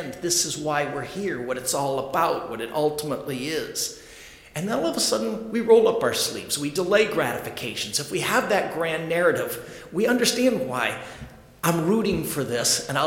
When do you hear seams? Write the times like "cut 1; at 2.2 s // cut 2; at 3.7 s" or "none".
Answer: none